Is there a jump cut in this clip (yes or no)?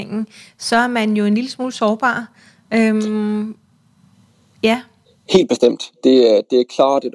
no